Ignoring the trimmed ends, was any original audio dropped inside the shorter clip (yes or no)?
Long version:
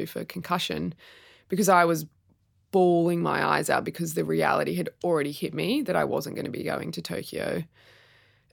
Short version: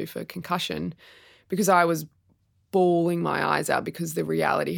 no